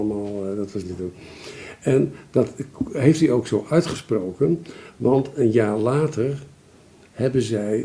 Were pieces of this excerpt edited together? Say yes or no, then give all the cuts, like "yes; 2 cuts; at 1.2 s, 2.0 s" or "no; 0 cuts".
no; 0 cuts